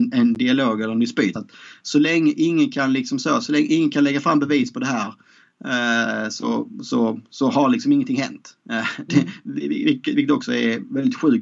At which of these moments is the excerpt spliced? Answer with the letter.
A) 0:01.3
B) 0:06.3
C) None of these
A